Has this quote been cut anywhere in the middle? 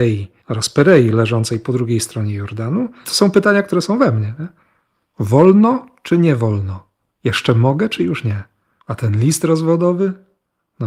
yes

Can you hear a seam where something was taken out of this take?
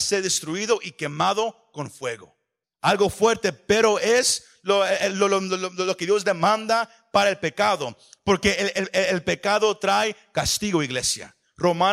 yes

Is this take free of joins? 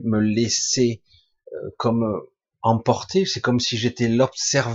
yes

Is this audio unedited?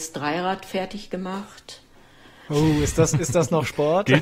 no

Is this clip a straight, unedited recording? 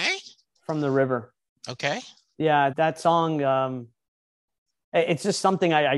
no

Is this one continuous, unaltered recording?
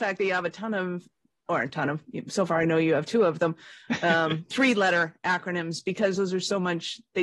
yes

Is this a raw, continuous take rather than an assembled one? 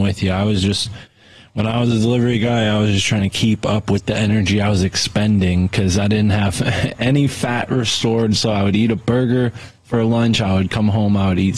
yes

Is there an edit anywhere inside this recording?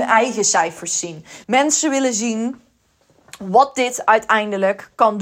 yes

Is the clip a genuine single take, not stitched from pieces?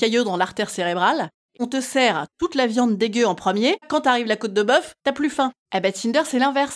no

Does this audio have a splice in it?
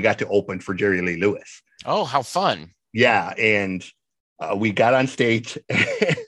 no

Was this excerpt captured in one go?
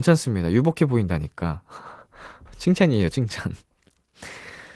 yes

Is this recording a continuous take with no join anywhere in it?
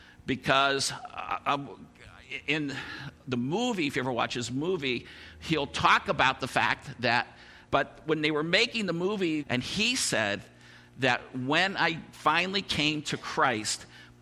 no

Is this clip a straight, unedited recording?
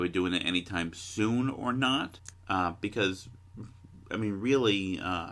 no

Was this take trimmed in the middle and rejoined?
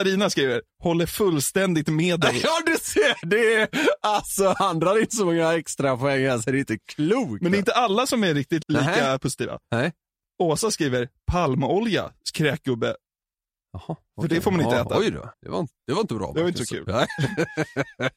yes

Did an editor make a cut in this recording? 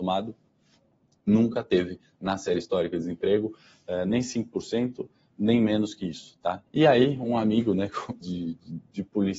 yes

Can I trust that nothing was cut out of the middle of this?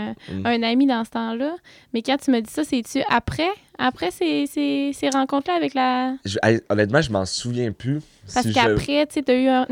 yes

